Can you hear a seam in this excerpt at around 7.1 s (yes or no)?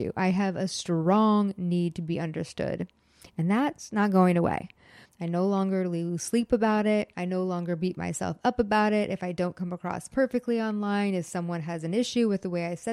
no